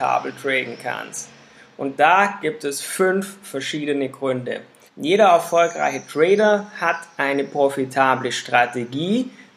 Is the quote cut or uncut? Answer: cut